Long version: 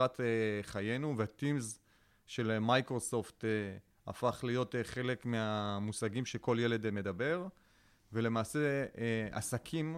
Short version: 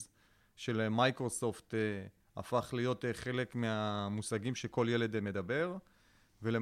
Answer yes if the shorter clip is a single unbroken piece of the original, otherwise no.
yes